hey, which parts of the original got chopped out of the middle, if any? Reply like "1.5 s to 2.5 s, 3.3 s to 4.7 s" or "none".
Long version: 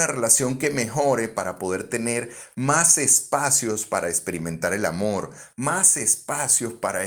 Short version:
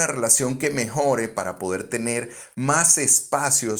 none